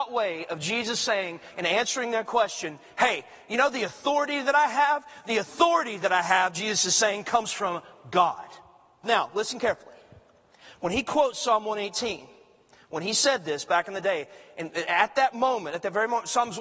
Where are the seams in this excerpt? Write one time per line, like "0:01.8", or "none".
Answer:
0:09.0